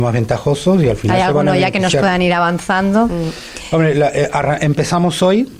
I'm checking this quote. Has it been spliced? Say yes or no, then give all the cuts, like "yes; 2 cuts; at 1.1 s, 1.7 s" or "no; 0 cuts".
no; 0 cuts